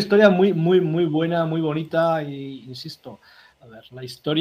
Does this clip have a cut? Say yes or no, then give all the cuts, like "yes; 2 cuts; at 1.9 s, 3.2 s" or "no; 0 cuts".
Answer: yes; 1 cut; at 3.5 s